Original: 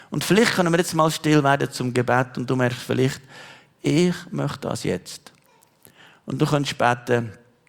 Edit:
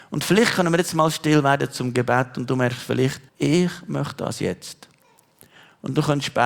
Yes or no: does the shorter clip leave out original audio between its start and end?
yes